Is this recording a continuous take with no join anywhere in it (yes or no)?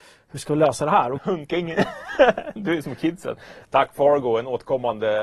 no